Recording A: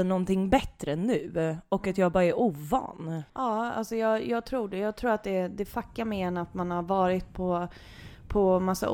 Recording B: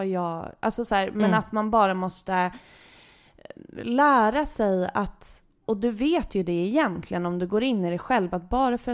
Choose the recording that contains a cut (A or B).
A